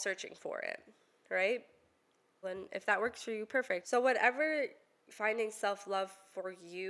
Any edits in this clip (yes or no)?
yes